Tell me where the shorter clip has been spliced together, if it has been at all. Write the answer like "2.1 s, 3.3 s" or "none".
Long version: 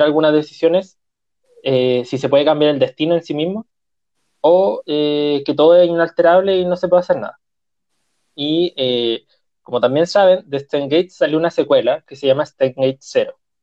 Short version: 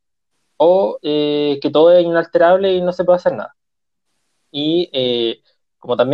none